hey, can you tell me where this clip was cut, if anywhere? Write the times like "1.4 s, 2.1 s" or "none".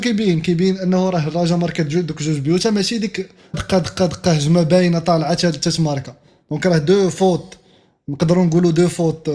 3.5 s